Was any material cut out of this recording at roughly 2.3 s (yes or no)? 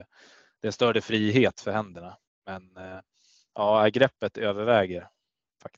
yes